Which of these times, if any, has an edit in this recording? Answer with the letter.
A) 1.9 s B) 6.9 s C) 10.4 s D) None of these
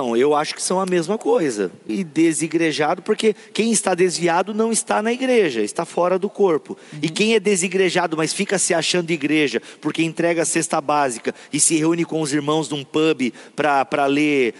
A